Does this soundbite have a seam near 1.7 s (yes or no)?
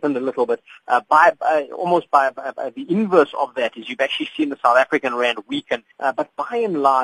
no